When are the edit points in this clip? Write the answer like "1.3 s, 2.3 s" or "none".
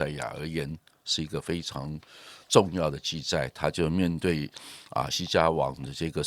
5.1 s